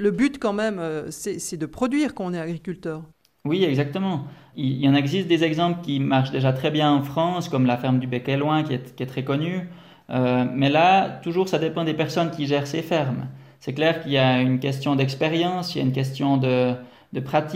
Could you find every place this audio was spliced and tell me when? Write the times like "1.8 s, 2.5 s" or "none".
none